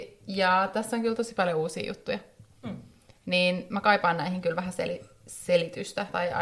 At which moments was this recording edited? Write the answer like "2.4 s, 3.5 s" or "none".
none